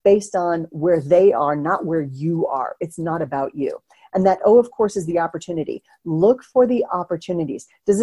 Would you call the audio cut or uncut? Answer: uncut